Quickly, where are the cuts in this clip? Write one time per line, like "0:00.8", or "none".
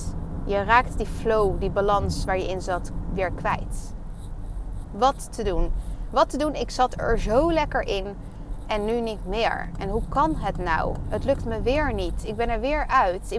0:04.8